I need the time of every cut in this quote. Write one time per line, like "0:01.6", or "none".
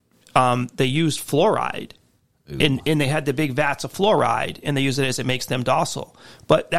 none